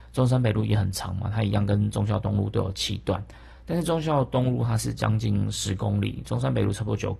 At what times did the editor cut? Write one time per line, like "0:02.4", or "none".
none